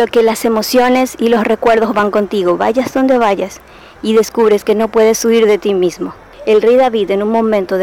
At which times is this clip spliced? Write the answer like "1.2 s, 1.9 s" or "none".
6.3 s

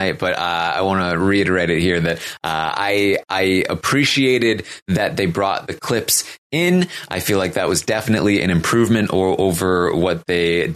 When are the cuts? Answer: none

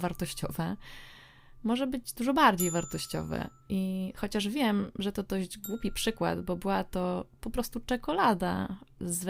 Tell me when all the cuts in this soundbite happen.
3.6 s

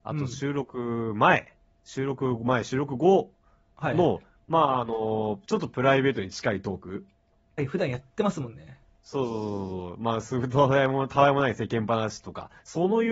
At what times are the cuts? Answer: 5.4 s, 7.6 s

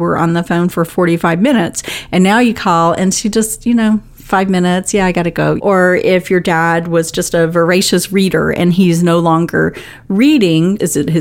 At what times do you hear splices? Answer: 5.6 s

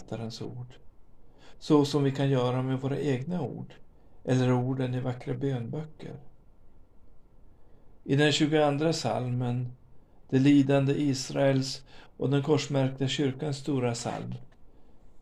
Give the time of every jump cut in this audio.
8.0 s

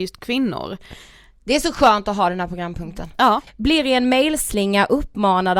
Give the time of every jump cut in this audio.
3.5 s

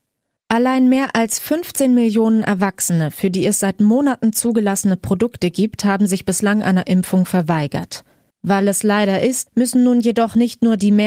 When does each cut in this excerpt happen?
8.3 s, 9.5 s

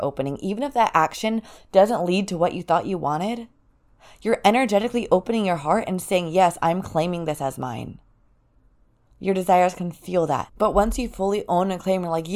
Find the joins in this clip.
10.5 s

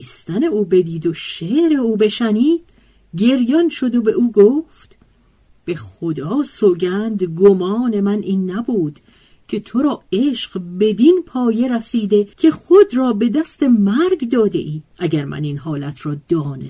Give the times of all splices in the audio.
12.3 s, 14.9 s

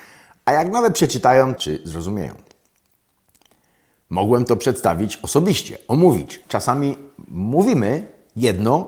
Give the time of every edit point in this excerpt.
1.6 s, 6.4 s

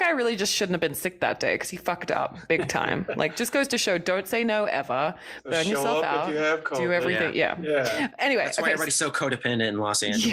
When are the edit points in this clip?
none

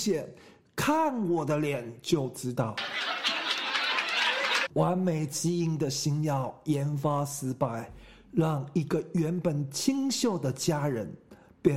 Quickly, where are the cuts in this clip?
4.6 s

